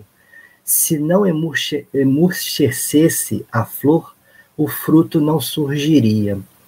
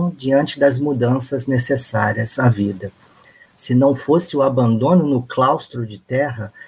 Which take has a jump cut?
second; 1 cut; at 3.5 s

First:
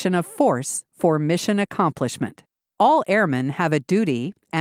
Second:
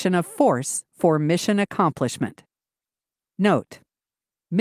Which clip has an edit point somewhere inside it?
first; 1 cut; at 2.7 s

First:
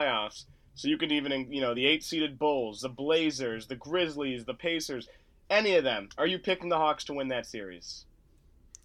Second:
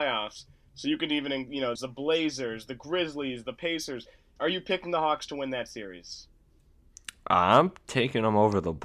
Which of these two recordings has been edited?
second; 2 cuts; at 1.8 s, 4.4 s

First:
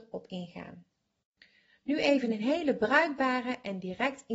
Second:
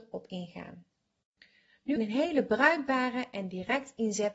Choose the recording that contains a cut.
second; 1 cut; at 2.0 s

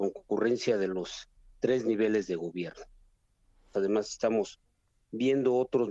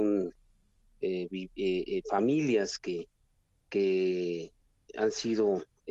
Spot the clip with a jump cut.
first; 1 cut; at 3.7 s

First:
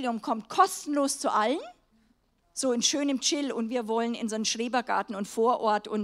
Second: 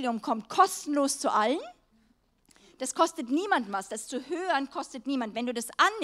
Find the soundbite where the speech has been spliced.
first; 1 cut; at 2.4 s

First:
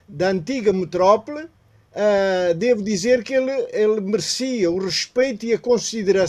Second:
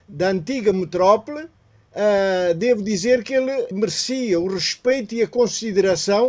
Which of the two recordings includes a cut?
second; 1 cut; at 3.7 s

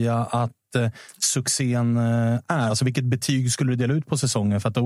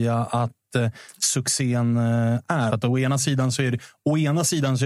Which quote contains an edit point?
second; 1 cut; at 2.7 s

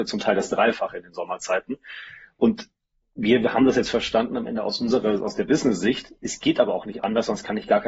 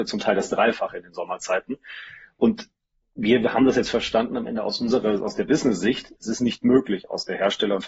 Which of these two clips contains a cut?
second; 1 cut; at 6.2 s

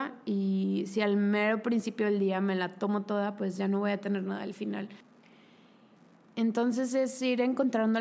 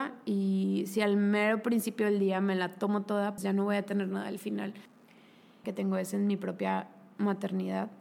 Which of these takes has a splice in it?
second; 2 cuts; at 3.4 s, 5.6 s

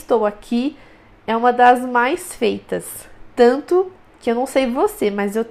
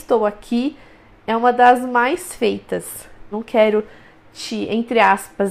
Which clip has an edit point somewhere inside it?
second; 1 cut; at 3.3 s

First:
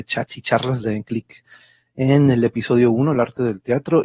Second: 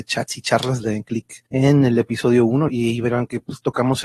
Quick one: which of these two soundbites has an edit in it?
second; 2 cuts; at 1.5 s, 2.7 s

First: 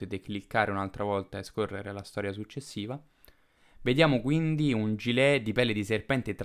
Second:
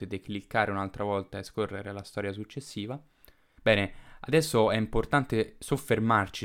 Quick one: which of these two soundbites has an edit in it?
second; 1 cut; at 3.6 s

